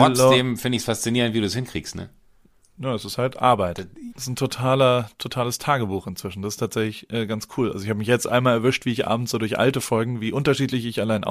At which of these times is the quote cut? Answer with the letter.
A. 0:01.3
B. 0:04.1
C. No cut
B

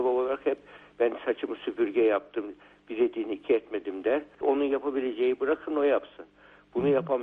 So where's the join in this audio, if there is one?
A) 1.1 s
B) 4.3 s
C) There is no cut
B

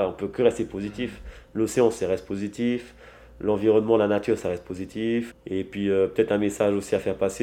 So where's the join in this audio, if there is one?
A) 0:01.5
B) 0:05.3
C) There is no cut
B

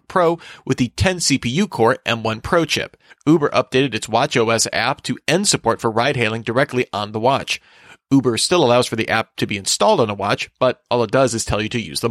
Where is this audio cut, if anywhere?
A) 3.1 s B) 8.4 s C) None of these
A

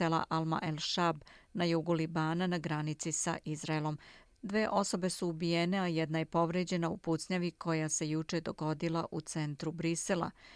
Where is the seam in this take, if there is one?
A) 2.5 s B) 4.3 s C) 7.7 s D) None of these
B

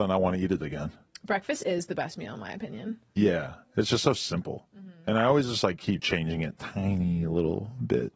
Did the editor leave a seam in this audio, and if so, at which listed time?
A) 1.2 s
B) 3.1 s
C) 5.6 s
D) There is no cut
D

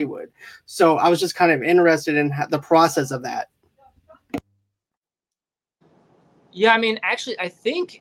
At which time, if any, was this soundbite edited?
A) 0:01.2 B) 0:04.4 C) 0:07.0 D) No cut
D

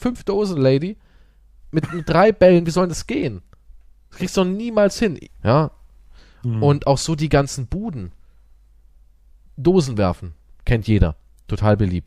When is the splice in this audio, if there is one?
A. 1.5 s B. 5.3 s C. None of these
B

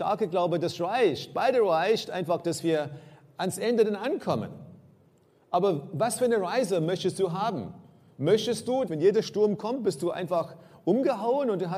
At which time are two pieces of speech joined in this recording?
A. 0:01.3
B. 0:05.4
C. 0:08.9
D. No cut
C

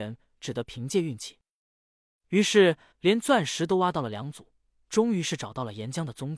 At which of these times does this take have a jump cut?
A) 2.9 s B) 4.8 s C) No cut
A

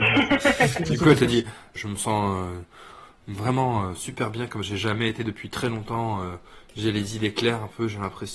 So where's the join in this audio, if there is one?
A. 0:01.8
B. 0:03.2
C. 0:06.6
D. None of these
A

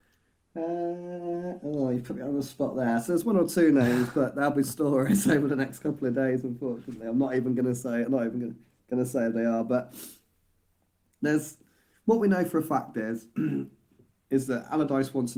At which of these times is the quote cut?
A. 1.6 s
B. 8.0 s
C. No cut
C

